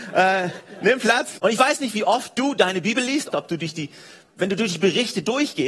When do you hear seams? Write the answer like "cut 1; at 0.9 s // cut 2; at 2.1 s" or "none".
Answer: cut 1; at 1.4 s // cut 2; at 3.3 s